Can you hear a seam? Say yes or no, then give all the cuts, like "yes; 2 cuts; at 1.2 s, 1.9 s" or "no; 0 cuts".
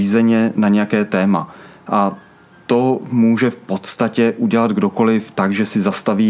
no; 0 cuts